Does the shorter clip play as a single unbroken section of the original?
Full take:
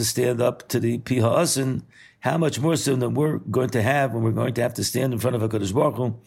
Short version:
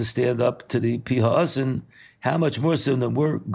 yes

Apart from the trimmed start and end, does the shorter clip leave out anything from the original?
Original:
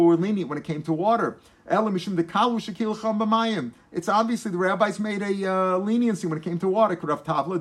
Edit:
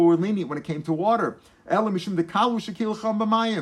no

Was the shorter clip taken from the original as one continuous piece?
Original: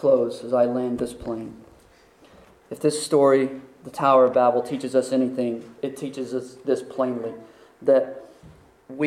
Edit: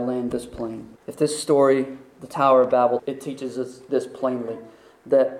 no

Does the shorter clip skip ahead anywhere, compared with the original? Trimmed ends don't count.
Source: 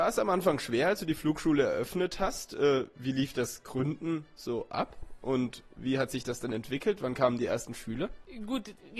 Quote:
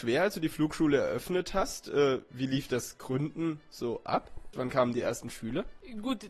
yes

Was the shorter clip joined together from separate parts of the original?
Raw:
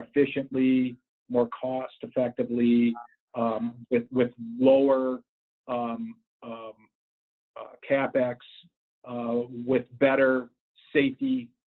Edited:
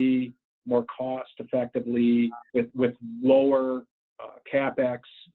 yes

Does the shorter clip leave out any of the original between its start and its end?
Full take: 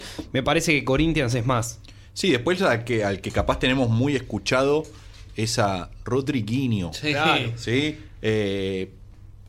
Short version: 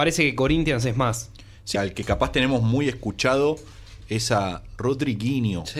yes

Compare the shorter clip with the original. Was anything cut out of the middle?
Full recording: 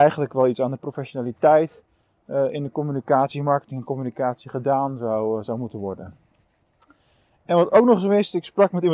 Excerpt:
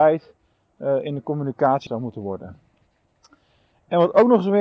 yes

